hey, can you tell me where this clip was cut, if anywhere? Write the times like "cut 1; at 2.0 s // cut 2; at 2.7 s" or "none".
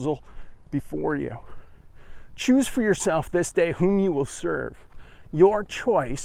none

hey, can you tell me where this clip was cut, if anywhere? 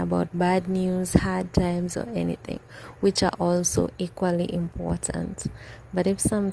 none

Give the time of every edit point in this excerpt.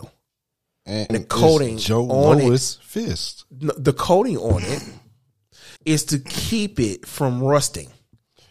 cut 1; at 1.1 s // cut 2; at 5.8 s

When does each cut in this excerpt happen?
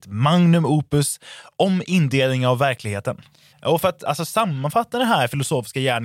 cut 1; at 3.5 s

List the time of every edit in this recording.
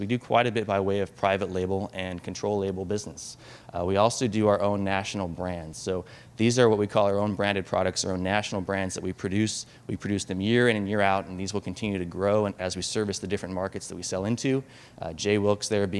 none

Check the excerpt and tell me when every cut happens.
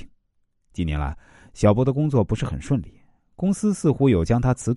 none

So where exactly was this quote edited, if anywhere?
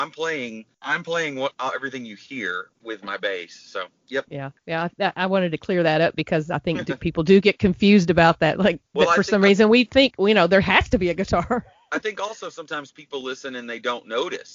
cut 1; at 4.0 s

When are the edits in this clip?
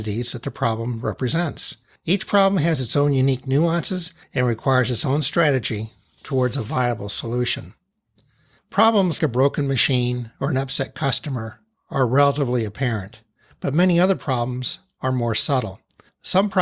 cut 1; at 9.2 s

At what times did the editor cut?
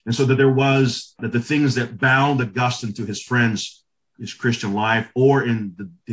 cut 1; at 1.2 s // cut 2; at 4.1 s

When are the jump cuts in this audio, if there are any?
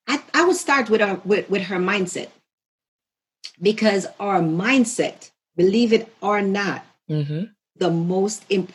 none

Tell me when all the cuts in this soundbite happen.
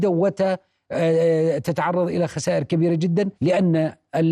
cut 1; at 3.3 s

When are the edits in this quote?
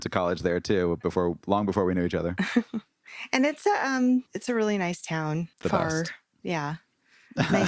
cut 1; at 4.3 s // cut 2; at 5.5 s

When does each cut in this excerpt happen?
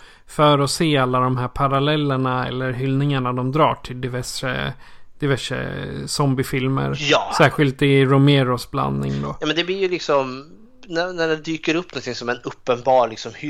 none

